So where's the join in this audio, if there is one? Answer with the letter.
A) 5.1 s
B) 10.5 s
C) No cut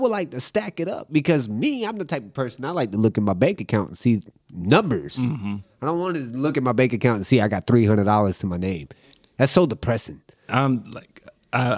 B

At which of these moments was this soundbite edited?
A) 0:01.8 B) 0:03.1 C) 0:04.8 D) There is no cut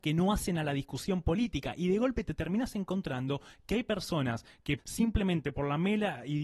C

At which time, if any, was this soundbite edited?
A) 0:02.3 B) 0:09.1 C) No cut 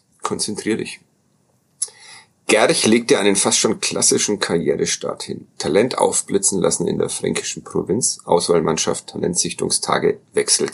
C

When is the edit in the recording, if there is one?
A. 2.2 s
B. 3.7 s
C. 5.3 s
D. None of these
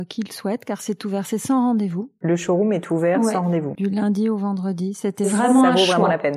D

